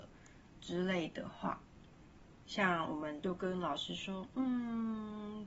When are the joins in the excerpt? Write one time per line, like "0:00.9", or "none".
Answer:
0:02.4